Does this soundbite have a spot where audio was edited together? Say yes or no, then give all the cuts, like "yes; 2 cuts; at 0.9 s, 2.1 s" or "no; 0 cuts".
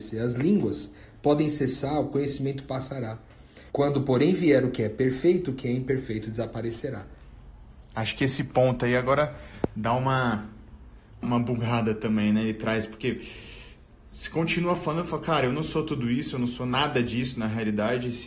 yes; 2 cuts; at 3.7 s, 11.2 s